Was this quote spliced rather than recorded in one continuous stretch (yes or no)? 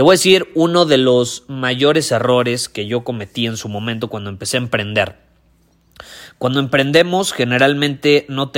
no